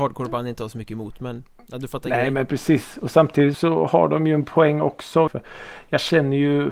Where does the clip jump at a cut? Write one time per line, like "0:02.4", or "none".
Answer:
0:03.5
0:05.3